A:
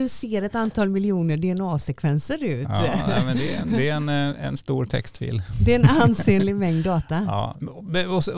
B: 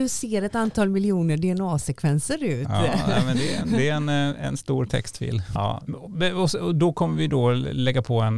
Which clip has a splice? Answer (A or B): B